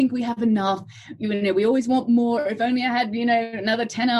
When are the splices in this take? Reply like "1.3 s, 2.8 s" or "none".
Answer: none